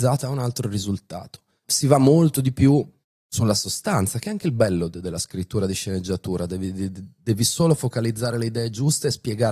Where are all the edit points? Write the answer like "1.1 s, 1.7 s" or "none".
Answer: none